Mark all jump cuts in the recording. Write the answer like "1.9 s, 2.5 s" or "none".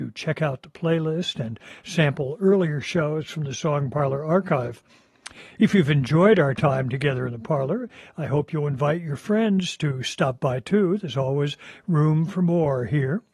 none

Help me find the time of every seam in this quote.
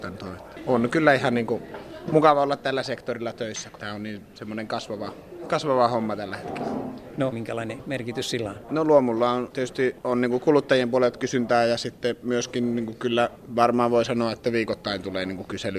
7.3 s

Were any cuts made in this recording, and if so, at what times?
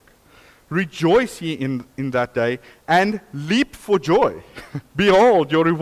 4.9 s

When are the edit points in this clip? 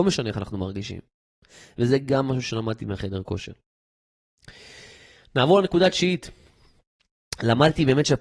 none

